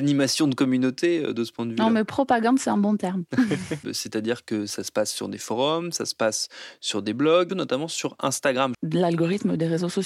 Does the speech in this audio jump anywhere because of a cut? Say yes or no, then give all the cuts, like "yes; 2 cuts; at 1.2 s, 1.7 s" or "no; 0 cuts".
yes; 3 cuts; at 3.8 s, 7.5 s, 8.7 s